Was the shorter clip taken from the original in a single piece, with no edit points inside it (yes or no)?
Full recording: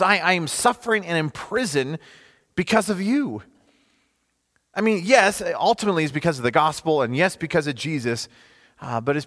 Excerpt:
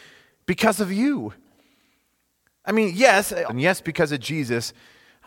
no